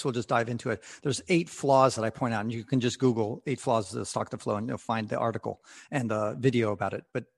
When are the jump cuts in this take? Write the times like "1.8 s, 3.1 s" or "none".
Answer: none